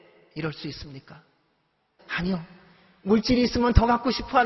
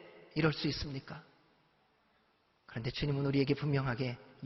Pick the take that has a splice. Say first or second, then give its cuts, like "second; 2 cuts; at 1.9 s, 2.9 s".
first; 1 cut; at 2.0 s